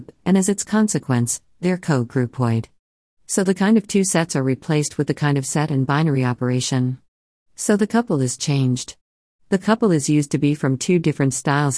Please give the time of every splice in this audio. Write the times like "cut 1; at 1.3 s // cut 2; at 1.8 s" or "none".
none